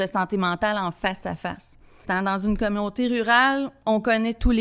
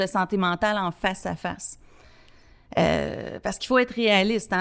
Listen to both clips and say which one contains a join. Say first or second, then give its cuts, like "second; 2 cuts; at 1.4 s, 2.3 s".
first; 1 cut; at 2.0 s